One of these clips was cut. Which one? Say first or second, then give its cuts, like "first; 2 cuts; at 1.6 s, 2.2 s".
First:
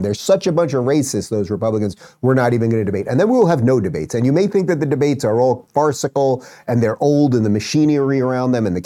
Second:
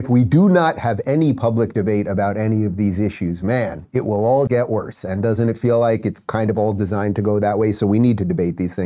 second; 1 cut; at 4.5 s